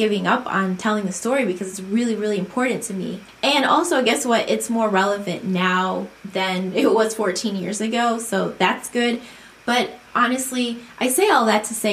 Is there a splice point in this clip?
no; 0 cuts

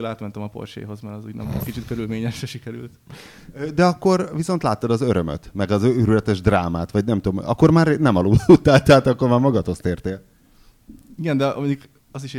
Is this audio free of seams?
yes; 0 cuts

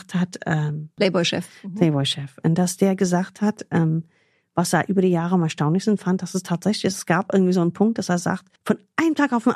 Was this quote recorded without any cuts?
no; 1 cut; at 8.6 s

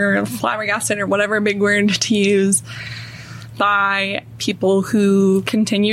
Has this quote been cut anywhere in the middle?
no; 0 cuts

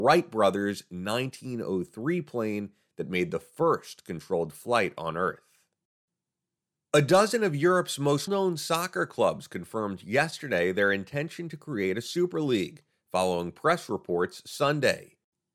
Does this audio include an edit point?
yes; 1 cut; at 8.3 s

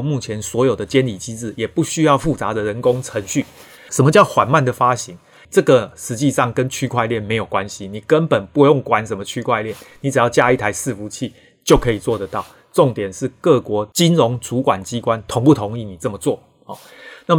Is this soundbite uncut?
no; 2 cuts; at 3.9 s, 5.4 s

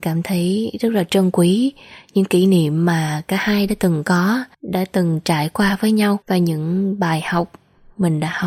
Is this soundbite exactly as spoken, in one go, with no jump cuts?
no; 2 cuts; at 4.5 s, 6.2 s

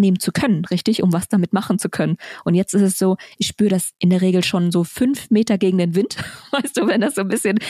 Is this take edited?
no; 0 cuts

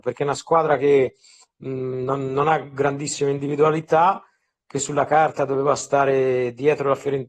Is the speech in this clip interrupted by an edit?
no; 0 cuts

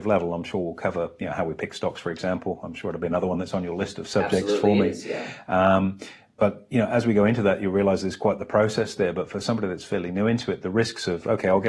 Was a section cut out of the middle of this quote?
no; 0 cuts

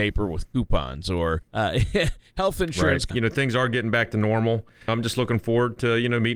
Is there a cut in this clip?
yes; 3 cuts; at 1.5 s, 3.1 s, 4.9 s

